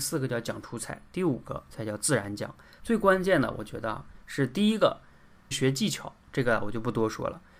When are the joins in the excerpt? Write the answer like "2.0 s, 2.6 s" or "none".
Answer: 2.8 s, 5.5 s